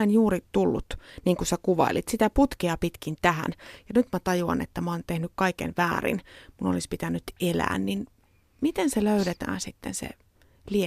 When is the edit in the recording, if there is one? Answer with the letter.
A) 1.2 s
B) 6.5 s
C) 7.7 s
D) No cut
D